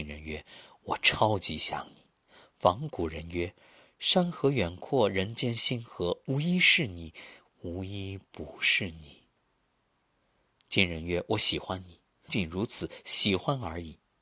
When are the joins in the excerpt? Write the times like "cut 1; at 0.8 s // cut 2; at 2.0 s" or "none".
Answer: cut 1; at 12.3 s